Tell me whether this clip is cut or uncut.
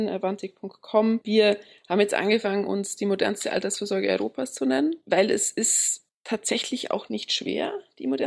cut